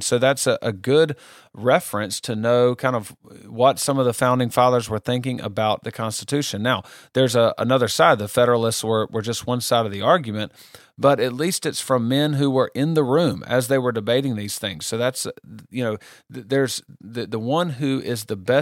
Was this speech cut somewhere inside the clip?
no; 0 cuts

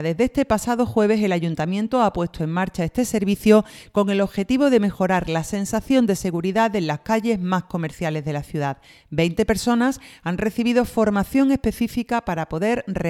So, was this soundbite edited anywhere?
no; 0 cuts

